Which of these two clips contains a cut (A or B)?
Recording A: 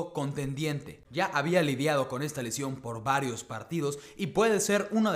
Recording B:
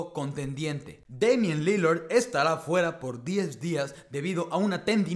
A